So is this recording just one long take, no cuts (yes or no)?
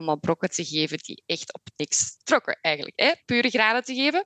yes